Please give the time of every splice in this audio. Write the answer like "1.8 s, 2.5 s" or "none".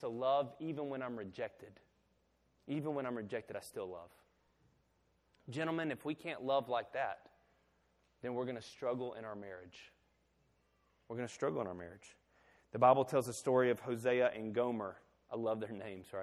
none